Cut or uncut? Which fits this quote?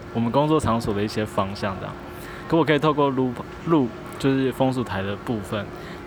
uncut